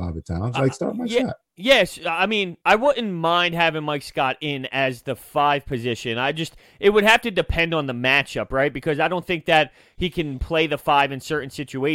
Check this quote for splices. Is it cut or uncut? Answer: cut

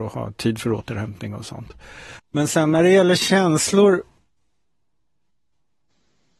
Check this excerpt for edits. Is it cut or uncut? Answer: cut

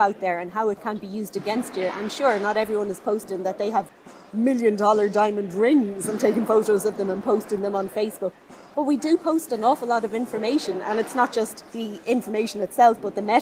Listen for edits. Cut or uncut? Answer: uncut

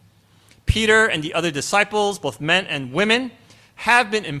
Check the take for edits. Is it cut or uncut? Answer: uncut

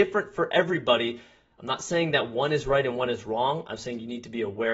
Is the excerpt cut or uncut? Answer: uncut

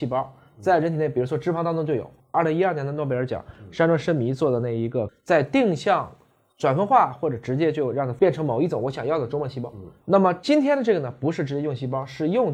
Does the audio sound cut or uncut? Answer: cut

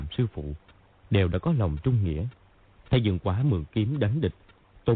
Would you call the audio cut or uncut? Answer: cut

